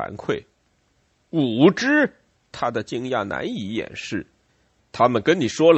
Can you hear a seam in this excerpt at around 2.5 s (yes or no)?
yes